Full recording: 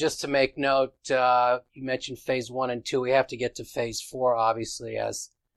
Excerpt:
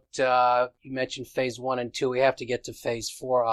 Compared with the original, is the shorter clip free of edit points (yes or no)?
yes